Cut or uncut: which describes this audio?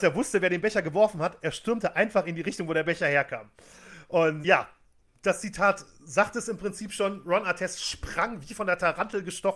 cut